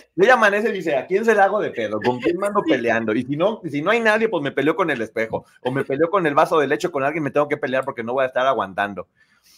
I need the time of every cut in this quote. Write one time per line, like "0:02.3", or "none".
none